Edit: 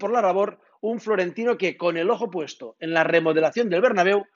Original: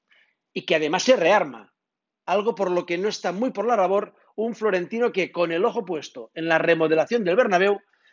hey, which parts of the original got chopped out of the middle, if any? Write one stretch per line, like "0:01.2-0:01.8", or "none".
none